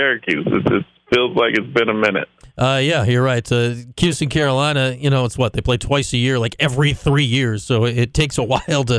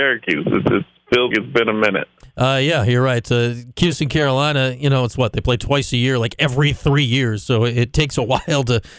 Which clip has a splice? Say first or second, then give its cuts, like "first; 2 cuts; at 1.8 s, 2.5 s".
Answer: second; 1 cut; at 1.3 s